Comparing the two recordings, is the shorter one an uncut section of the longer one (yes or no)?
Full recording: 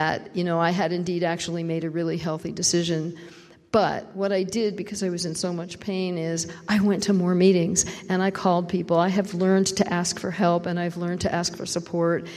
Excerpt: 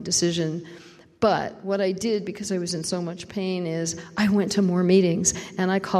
yes